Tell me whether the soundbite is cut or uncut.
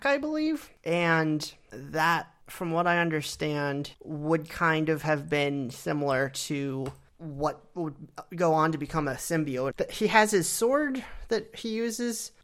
cut